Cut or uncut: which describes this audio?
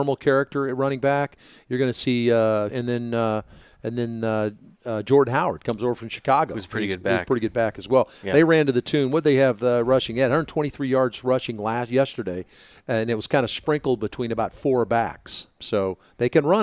cut